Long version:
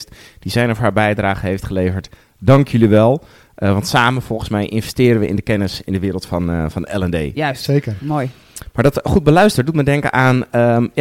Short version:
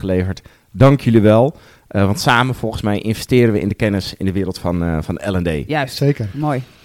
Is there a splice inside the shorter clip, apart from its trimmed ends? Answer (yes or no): no